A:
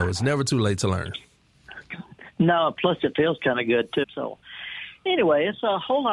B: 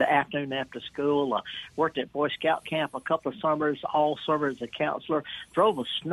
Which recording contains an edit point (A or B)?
A